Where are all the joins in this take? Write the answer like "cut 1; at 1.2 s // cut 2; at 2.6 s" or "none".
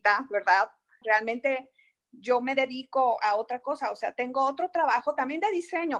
cut 1; at 1.0 s

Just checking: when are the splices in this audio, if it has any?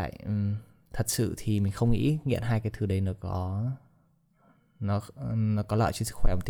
none

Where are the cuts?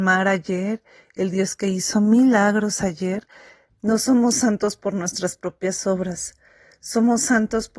cut 1; at 3.7 s

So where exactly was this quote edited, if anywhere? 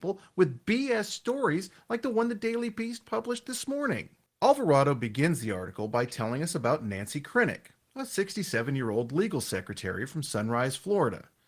cut 1; at 4.3 s

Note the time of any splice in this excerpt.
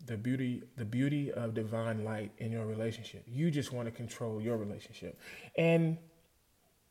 none

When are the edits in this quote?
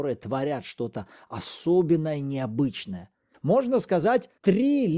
cut 1; at 3.3 s

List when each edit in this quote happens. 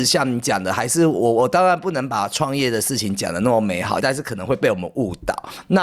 cut 1; at 4.0 s

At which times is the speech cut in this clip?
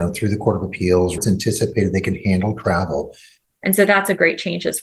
cut 1; at 1.2 s // cut 2; at 3.6 s

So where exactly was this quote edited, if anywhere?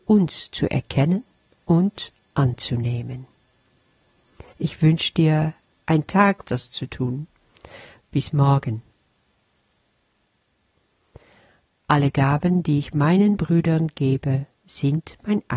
cut 1; at 4.5 s // cut 2; at 6.4 s

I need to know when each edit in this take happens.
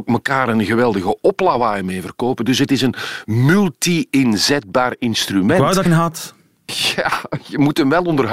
cut 1; at 5.9 s

